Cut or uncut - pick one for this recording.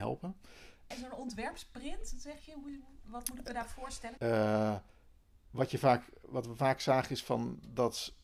cut